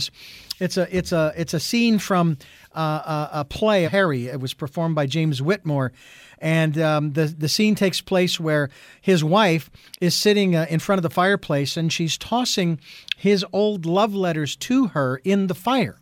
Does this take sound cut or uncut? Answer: cut